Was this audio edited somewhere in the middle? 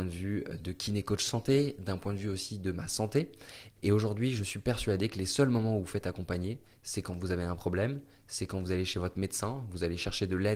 yes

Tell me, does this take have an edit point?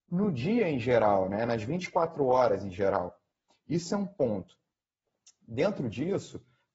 no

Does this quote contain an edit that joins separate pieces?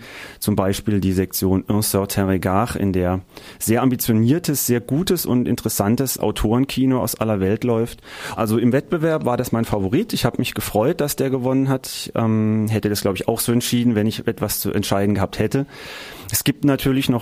yes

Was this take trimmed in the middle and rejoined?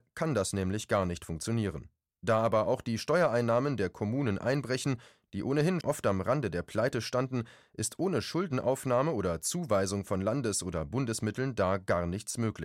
yes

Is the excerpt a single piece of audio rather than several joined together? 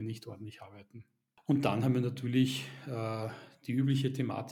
yes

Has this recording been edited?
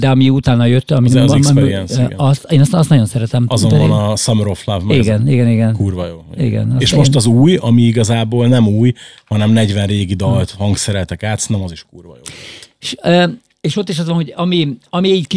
no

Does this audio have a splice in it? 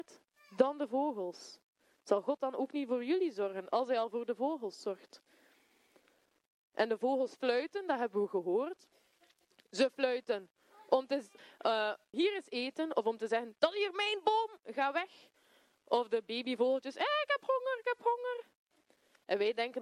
yes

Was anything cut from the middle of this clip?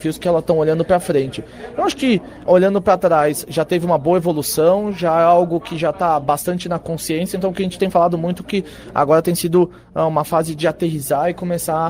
yes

